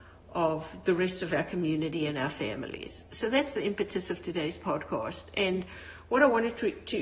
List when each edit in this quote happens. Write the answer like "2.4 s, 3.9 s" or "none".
none